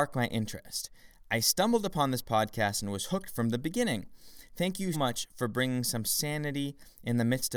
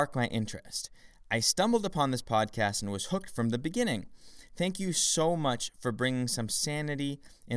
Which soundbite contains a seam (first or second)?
first